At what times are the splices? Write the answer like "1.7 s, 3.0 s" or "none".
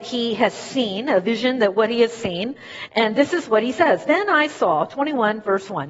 none